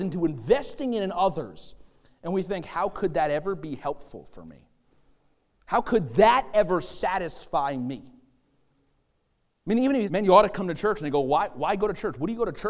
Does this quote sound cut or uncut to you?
cut